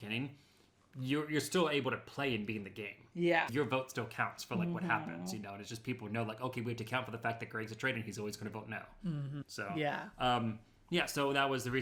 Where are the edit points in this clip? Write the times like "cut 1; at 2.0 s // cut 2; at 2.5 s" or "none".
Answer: cut 1; at 3.5 s // cut 2; at 9.4 s